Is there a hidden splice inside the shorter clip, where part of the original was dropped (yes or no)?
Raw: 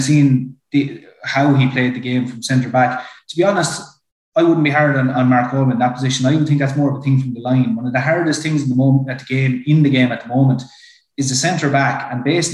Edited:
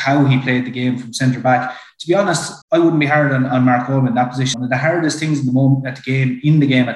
yes